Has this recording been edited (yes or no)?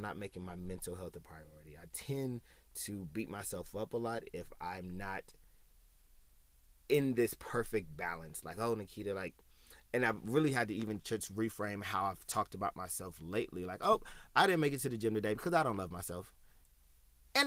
no